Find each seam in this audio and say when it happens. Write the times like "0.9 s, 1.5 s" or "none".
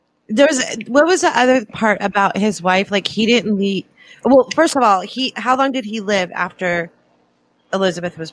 none